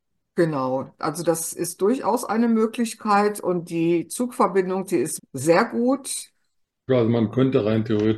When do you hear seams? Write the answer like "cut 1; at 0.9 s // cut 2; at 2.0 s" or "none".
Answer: cut 1; at 5.2 s // cut 2; at 6.9 s